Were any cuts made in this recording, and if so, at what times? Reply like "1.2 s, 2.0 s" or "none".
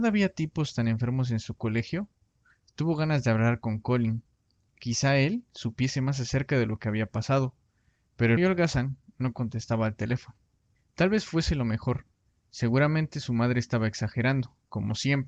8.4 s